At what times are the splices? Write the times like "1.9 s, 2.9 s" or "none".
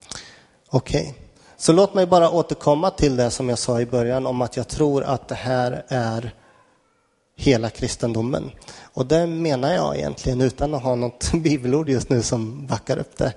none

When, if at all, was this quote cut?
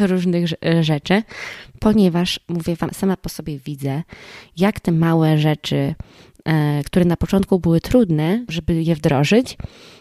2.9 s

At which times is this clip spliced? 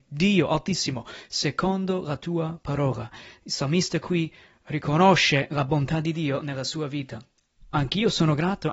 7.6 s

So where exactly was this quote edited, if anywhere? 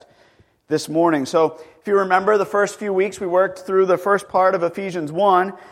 none

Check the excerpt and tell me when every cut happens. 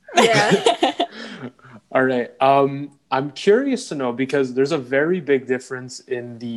none

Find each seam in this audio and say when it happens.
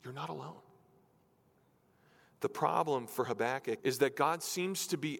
3.8 s

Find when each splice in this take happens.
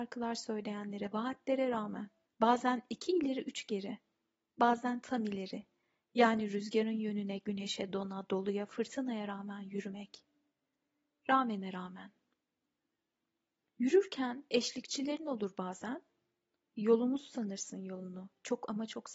2.3 s

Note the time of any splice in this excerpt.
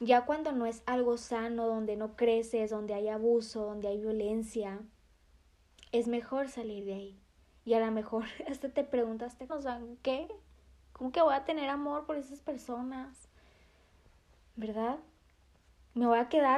9.5 s

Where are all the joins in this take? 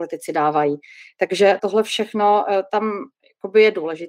1.6 s

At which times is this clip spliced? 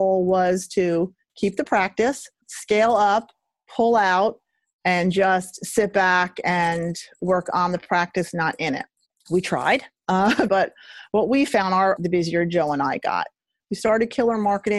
10.5 s, 12.0 s, 13.6 s

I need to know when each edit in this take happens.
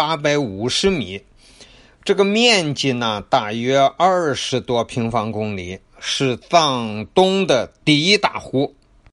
none

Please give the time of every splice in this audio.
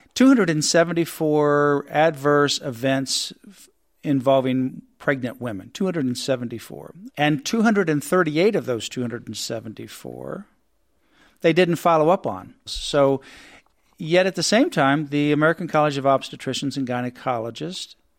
7.1 s, 12.7 s

